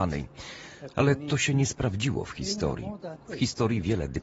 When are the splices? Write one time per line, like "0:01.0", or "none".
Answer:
0:03.2